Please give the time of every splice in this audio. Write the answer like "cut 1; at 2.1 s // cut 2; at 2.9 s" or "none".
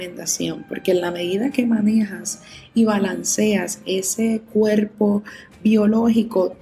none

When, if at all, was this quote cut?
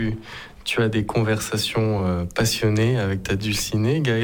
none

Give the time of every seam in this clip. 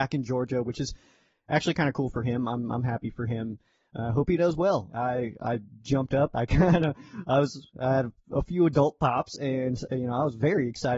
cut 1; at 4.9 s

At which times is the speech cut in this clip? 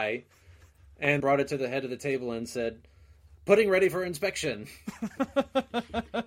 cut 1; at 1.2 s

